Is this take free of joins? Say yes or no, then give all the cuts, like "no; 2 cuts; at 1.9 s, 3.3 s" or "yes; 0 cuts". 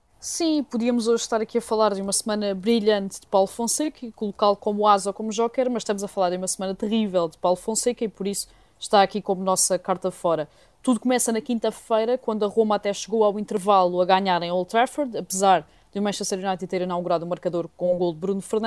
yes; 0 cuts